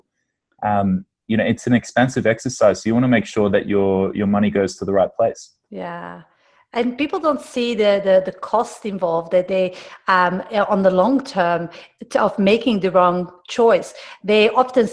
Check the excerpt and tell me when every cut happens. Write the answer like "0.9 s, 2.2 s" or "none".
9.5 s